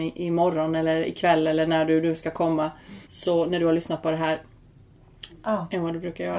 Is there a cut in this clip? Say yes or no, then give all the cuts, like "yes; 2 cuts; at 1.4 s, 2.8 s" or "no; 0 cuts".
yes; 2 cuts; at 3.0 s, 5.3 s